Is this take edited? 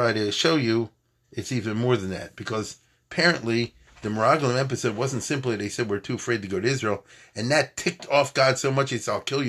no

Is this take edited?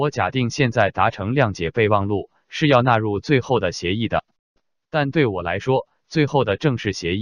no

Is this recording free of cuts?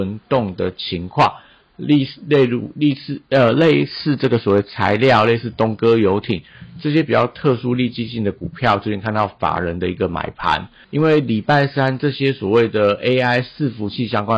no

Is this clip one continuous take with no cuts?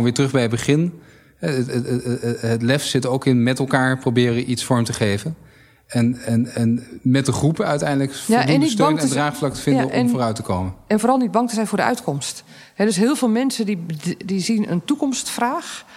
yes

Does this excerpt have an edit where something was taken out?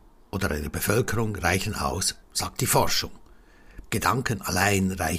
yes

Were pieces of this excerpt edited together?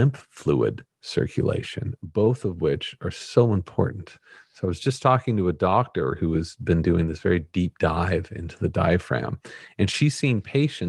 no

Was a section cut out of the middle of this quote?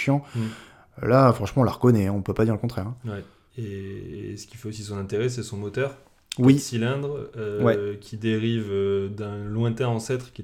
no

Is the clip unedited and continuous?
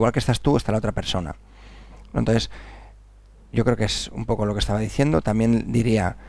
yes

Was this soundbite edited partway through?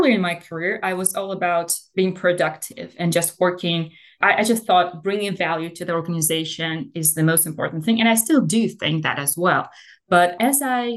no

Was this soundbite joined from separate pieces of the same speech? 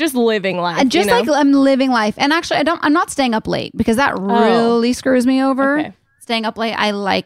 no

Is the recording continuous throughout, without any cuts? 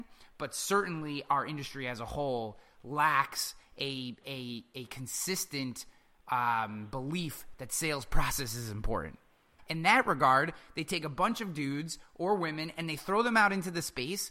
no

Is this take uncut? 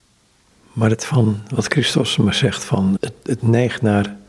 no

